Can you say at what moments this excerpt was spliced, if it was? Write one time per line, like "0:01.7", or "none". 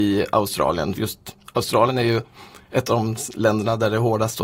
0:01.0